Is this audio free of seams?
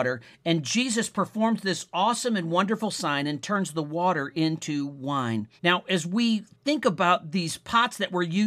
no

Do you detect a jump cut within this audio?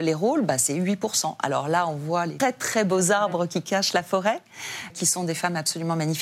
yes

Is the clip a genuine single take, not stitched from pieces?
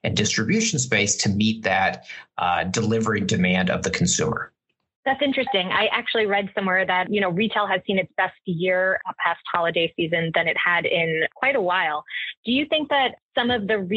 yes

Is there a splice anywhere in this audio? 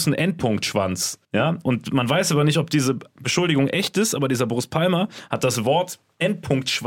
yes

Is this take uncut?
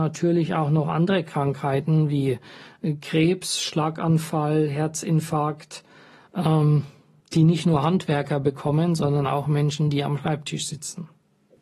yes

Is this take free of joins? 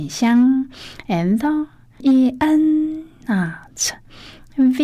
no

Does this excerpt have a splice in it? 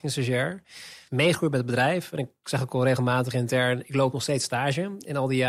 no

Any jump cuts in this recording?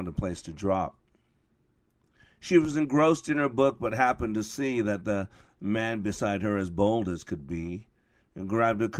no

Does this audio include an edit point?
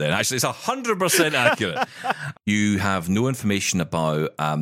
yes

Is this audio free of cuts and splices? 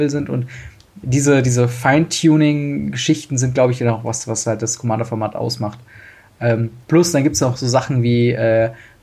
yes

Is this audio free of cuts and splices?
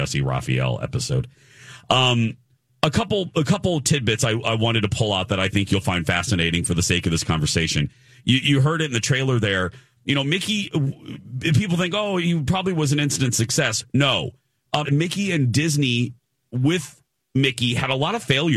no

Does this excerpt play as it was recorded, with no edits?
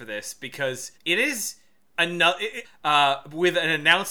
no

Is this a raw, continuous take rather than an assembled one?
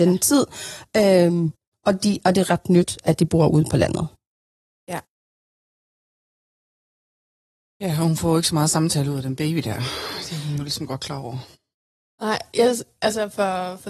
yes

